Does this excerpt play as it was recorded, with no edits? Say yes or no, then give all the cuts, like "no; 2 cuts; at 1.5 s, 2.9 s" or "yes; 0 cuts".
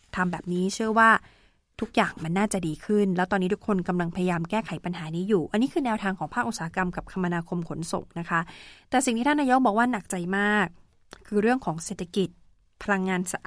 yes; 0 cuts